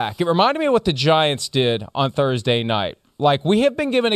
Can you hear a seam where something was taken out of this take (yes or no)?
no